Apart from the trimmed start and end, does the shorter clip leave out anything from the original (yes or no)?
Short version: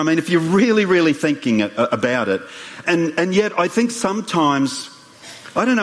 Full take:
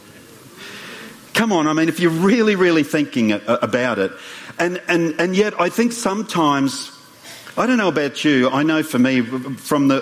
yes